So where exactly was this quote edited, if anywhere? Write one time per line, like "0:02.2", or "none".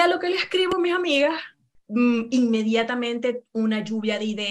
none